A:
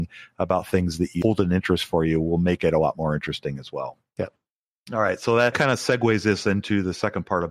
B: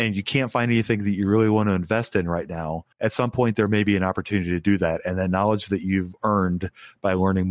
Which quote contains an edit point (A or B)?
B